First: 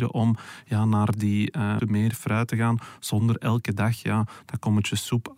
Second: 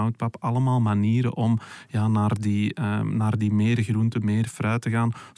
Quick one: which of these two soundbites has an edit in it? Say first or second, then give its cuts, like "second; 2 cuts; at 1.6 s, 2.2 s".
first; 1 cut; at 1.8 s